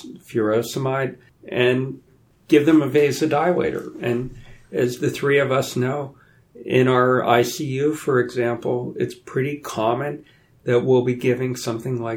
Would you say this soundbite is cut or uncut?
uncut